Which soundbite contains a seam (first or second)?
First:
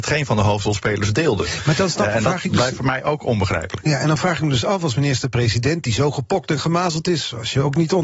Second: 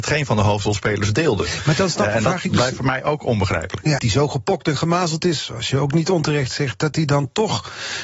second